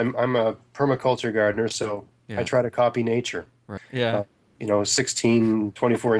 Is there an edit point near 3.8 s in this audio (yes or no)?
yes